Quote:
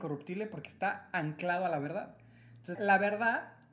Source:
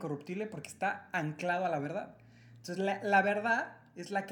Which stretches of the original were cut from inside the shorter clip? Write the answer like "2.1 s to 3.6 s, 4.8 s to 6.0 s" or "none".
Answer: 2.8 s to 3.0 s